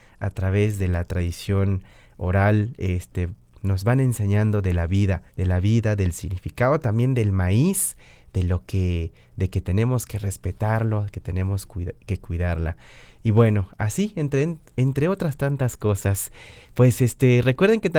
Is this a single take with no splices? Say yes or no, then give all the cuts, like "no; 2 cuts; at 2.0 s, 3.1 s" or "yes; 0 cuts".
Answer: no; 1 cut; at 5.3 s